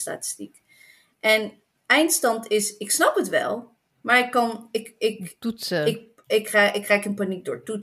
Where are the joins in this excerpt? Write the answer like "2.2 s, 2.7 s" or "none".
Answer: none

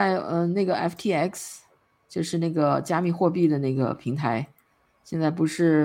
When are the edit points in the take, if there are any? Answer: none

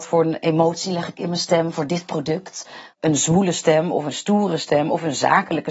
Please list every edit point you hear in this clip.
none

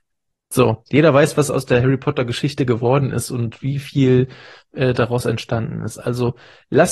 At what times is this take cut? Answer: none

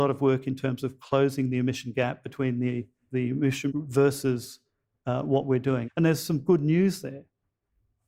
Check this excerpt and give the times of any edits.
3.7 s, 5.8 s

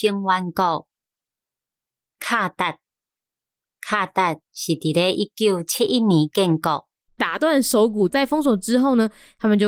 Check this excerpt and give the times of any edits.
7.1 s, 8.1 s

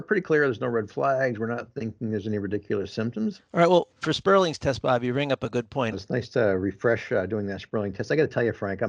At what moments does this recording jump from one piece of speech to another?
3.4 s, 5.9 s

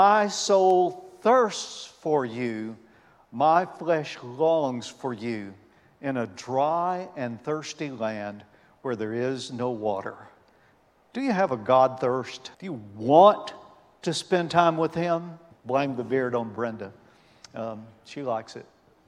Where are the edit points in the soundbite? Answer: 12.5 s, 15.5 s

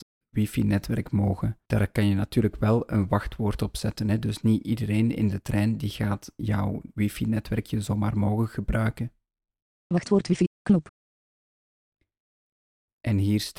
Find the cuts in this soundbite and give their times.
1.7 s

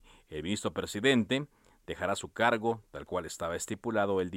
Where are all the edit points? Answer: none

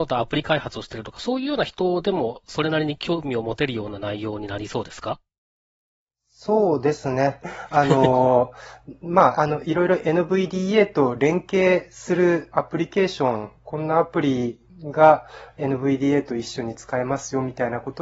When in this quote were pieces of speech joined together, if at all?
7.4 s, 12.5 s, 14.7 s

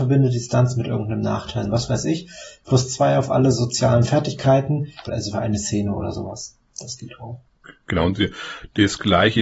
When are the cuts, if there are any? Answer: 1.6 s, 5.1 s

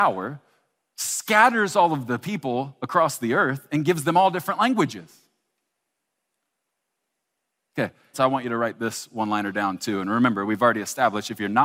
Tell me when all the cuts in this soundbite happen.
8.1 s

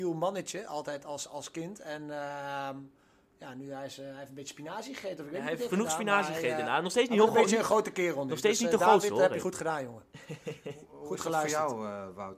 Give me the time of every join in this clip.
none

